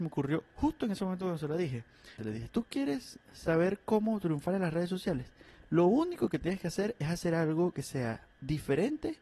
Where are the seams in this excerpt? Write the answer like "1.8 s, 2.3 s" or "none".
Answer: 2.2 s